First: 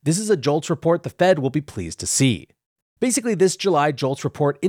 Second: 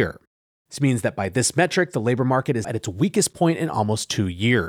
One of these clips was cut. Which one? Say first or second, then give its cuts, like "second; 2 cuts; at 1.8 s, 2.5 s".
second; 1 cut; at 2.6 s